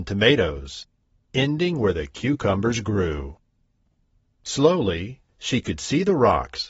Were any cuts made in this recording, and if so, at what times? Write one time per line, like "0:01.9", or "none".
0:04.3